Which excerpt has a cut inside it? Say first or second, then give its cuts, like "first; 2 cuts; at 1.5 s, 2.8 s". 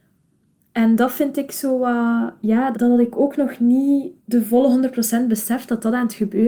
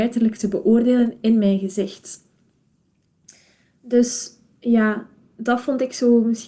first; 2 cuts; at 2.7 s, 4.2 s